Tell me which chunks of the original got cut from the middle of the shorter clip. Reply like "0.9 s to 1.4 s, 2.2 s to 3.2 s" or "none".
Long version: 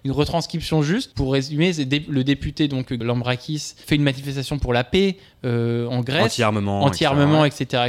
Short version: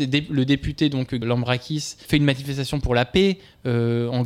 none

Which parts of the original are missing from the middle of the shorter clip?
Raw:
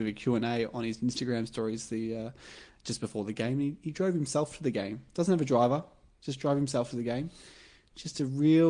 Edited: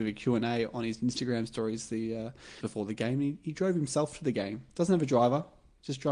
2.6 s to 3.0 s

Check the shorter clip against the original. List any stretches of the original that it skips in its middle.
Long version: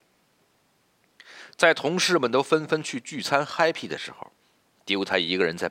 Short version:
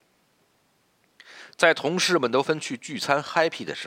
2.4 s to 2.7 s

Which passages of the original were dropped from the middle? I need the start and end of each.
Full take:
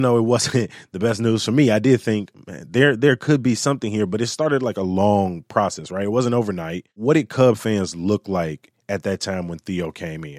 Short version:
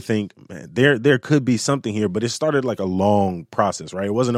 none

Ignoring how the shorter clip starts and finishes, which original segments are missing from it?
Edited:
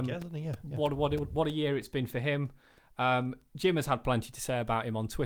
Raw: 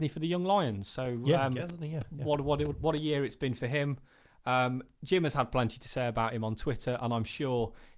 none

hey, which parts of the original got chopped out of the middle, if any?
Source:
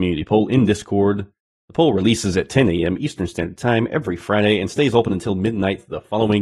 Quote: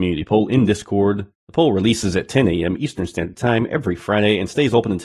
1.3 s to 1.5 s

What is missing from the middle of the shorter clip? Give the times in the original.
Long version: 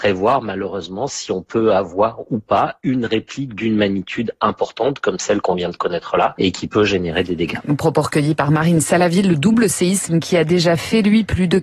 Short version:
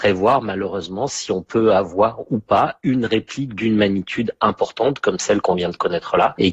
none

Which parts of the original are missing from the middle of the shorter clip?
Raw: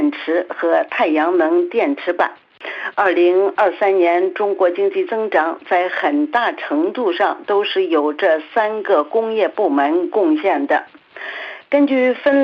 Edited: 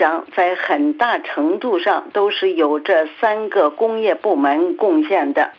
none

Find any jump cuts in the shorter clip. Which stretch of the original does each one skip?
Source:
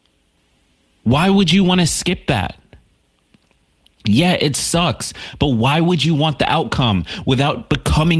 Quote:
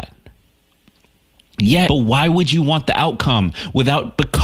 4.3 s to 5.4 s

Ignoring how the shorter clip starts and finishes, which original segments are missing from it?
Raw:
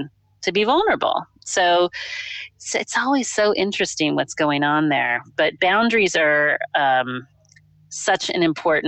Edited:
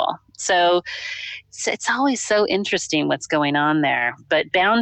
none

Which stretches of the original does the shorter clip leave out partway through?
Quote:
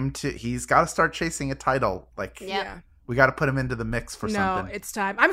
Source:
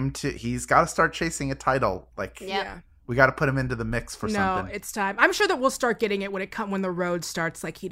none

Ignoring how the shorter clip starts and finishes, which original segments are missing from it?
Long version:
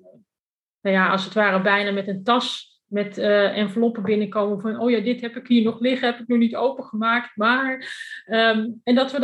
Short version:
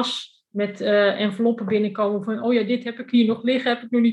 none

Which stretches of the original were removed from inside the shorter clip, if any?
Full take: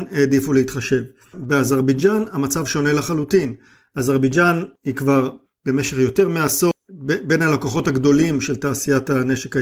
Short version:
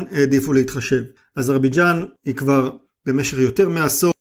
1.2 s to 3.8 s

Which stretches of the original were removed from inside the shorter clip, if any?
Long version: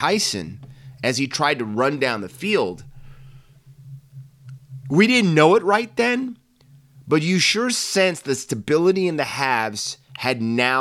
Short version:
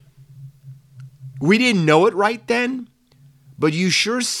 none

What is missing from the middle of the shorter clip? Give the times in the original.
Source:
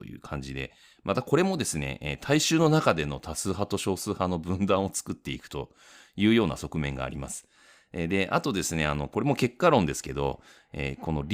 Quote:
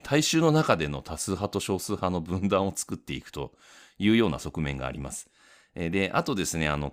none

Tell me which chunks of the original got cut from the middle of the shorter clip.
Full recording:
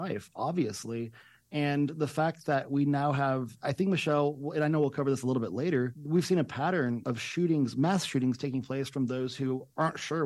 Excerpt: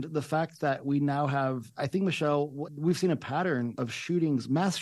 4.5 s to 5.9 s

